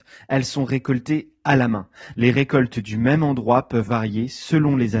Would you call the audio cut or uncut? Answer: cut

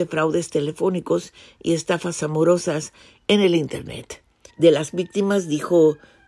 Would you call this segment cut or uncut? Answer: cut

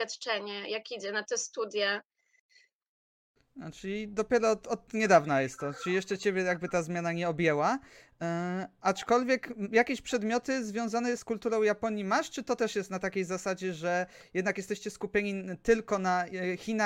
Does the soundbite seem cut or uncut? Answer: cut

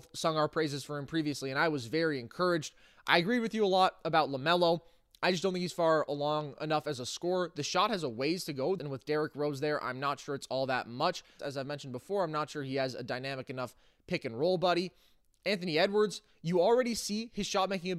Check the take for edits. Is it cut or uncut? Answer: cut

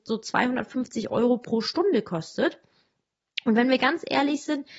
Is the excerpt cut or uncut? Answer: uncut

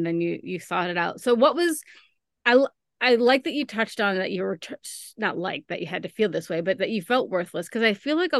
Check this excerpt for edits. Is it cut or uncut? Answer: uncut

